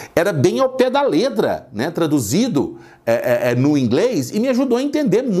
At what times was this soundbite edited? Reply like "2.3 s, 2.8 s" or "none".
none